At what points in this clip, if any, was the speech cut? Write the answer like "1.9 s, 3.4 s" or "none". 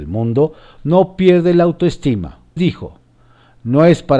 2.6 s